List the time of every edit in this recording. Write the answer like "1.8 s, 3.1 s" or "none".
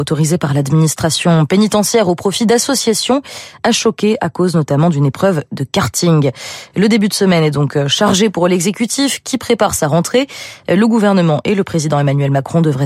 none